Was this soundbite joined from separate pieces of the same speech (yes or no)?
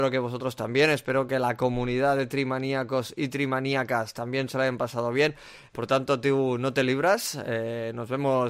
yes